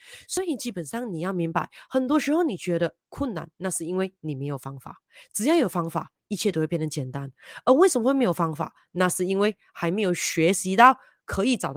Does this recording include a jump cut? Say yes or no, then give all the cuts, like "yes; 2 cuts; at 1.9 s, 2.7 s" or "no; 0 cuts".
no; 0 cuts